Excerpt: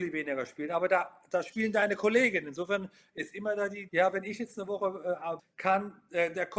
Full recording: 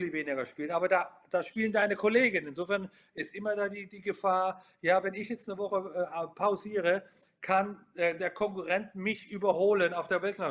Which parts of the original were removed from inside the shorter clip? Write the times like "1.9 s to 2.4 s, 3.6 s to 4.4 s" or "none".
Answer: 3.9 s to 4.8 s, 6.3 s to 7.2 s